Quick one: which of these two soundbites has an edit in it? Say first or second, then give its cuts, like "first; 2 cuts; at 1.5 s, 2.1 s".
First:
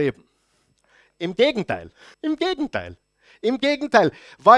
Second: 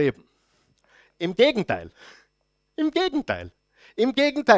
first; 1 cut; at 2.1 s